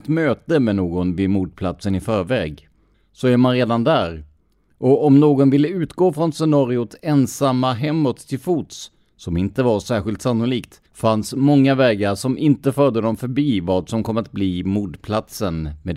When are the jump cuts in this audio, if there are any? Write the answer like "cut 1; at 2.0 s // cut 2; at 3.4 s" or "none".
cut 1; at 2.9 s // cut 2; at 10.9 s